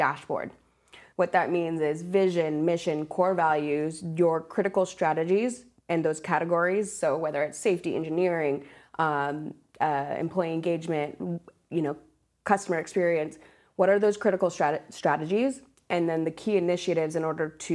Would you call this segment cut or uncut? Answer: uncut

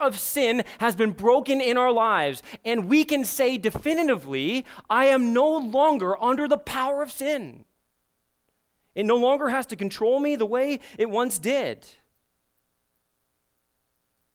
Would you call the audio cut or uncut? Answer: uncut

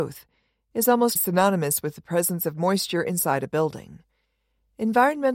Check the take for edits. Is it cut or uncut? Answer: cut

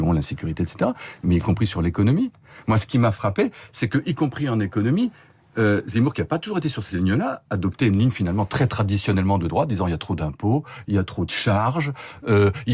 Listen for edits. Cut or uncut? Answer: uncut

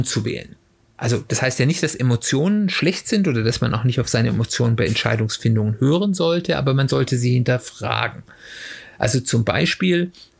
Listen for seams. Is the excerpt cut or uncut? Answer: uncut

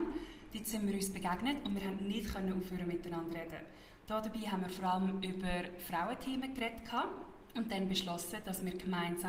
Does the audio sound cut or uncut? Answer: cut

